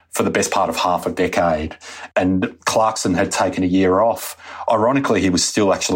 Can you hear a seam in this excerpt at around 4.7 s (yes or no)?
no